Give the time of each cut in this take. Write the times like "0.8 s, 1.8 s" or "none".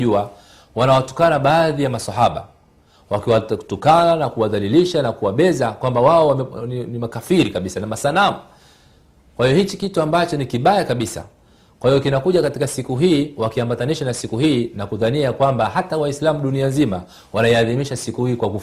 none